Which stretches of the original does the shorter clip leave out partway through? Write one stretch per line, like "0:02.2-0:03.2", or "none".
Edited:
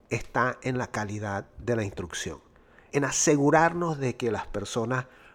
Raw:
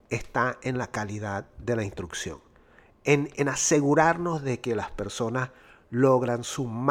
0:02.9-0:03.4

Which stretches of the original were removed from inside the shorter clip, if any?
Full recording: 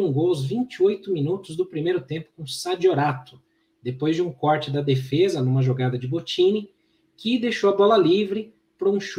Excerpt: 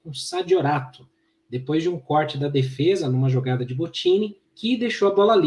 0:06.8-0:07.1

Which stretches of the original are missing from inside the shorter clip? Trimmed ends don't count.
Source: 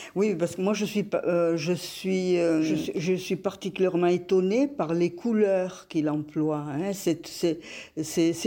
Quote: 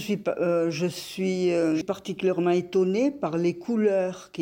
0:02.7-0:03.4

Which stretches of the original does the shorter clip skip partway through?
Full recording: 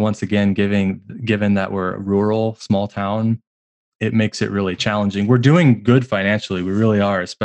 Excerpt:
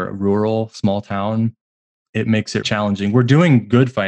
0:04.5-0:04.8

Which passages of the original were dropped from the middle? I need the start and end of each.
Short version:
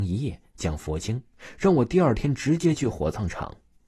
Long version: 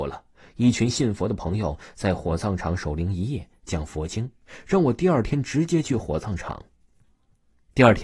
none

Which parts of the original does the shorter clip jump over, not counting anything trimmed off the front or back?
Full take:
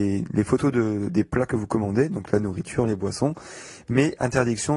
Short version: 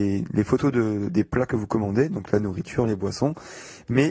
none

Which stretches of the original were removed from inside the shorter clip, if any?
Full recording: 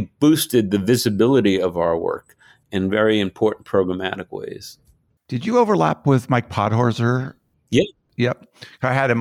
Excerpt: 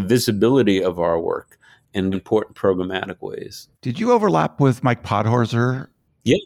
0:02.9-0:03.2
0:04.8-0:05.2

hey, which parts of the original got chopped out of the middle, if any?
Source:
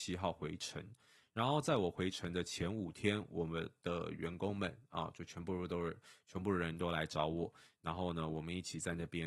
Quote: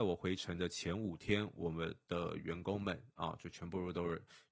none

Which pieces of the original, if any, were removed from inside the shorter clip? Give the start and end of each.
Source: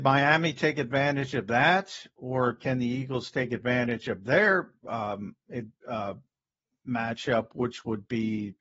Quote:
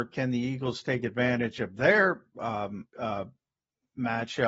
0:05.4-0:05.8

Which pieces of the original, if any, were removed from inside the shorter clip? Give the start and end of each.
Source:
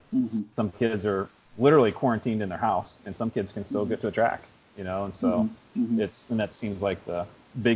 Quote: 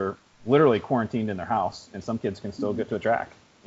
none

